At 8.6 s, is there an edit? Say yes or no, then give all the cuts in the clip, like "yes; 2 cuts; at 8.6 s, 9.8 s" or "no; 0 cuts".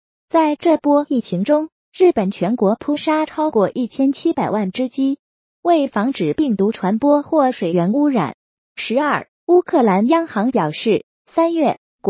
yes; 1 cut; at 8.6 s